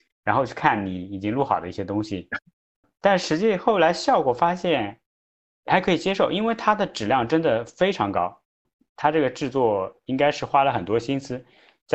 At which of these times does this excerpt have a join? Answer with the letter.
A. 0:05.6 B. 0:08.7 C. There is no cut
C